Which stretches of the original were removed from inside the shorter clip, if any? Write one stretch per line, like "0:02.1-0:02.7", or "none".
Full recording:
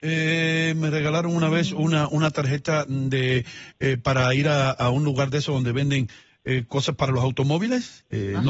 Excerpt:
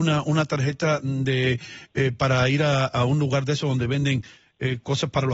none